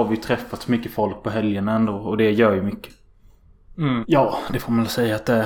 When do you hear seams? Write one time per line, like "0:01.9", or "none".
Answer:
0:04.0